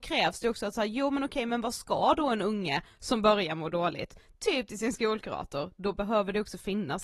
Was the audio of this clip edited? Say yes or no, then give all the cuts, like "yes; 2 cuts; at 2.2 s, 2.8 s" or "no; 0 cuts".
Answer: no; 0 cuts